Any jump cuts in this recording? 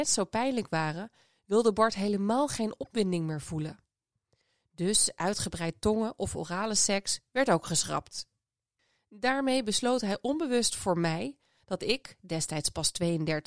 no; 0 cuts

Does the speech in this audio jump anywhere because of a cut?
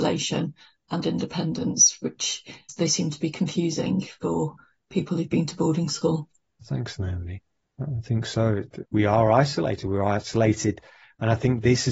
yes; 1 cut; at 6.6 s

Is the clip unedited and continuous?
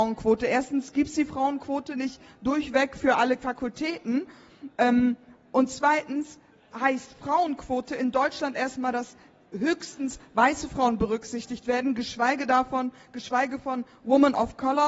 yes; 0 cuts

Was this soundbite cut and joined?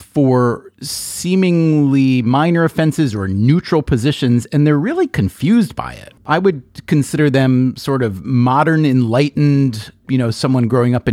yes; 2 cuts; at 6.2 s, 10.0 s

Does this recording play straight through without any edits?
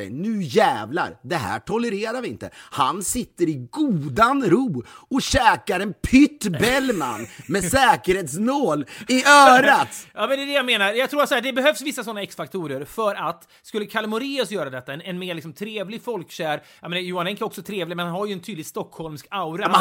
yes; 0 cuts

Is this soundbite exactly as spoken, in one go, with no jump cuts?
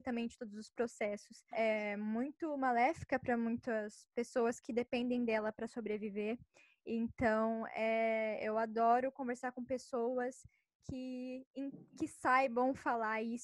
no; 1 cut; at 1.5 s

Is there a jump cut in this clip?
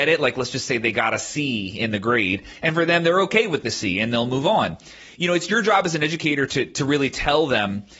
no; 0 cuts

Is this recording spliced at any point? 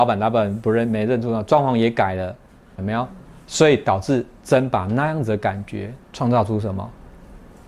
yes; 2 cuts; at 2.8 s, 6.0 s

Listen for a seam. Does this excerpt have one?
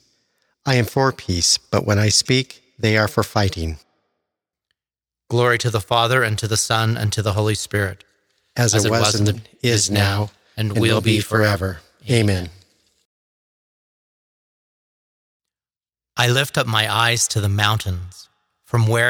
yes; 1 cut; at 9.3 s

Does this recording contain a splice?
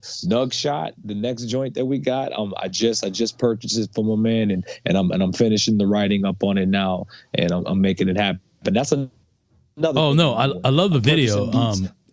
no; 0 cuts

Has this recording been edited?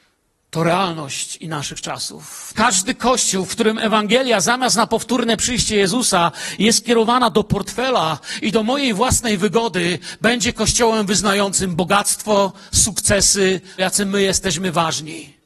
yes; 2 cuts; at 2.5 s, 13.8 s

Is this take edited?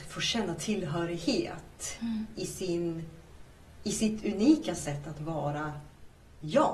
no; 0 cuts

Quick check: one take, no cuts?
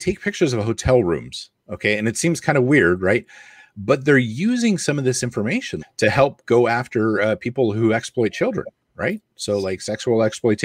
no; 1 cut; at 5.8 s

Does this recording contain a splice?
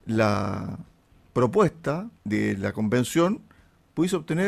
yes; 1 cut; at 2.2 s

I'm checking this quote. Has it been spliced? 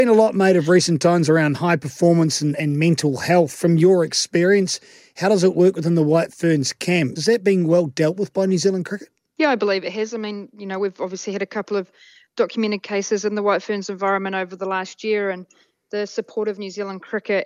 yes; 1 cut; at 7.2 s

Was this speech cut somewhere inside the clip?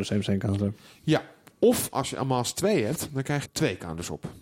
yes; 1 cut; at 3.4 s

